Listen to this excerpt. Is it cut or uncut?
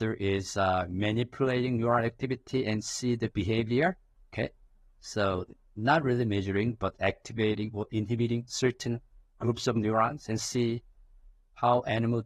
uncut